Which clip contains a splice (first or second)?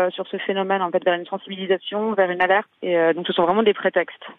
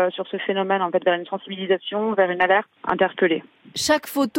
second